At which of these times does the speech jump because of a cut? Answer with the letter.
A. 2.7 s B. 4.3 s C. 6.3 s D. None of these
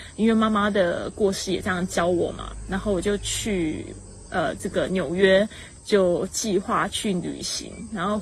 D